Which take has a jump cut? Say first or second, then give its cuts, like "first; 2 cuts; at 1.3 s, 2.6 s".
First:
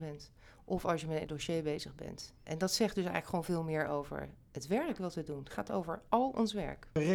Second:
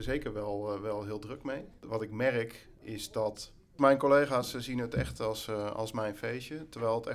first; 1 cut; at 2.4 s